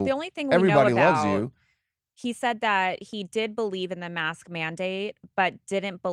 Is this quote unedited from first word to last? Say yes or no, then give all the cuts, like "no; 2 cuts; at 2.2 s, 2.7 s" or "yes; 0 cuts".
yes; 0 cuts